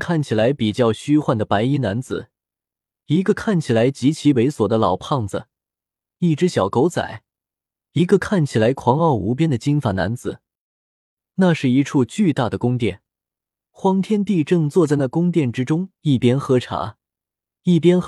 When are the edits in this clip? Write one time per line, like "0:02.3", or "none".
none